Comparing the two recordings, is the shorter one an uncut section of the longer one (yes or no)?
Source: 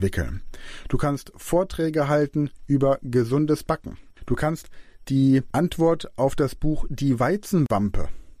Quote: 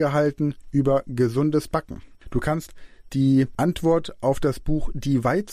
yes